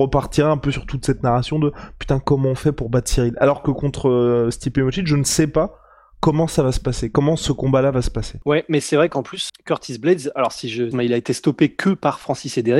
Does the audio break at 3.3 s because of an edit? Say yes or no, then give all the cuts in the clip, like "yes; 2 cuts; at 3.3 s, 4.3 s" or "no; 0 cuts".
no; 2 cuts; at 9.5 s, 10.9 s